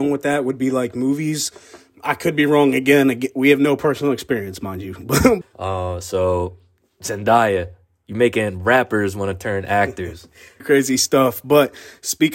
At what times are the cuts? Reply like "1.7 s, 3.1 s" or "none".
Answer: 5.4 s, 10.6 s